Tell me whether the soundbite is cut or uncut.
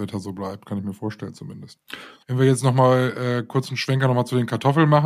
cut